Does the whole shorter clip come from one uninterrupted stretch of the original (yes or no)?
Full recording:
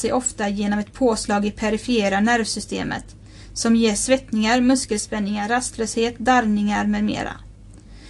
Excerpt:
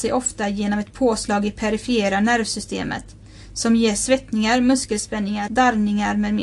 no